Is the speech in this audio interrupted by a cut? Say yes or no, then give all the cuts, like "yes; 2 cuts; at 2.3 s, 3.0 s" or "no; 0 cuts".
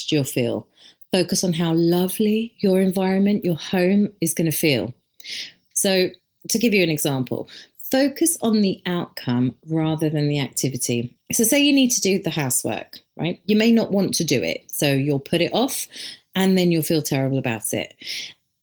yes; 1 cut; at 5.7 s